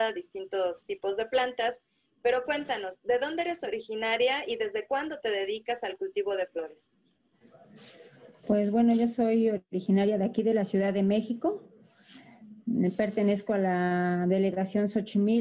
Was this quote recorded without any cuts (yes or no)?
yes